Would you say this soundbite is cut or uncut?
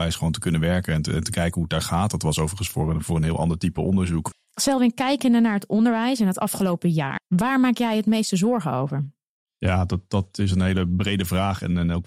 cut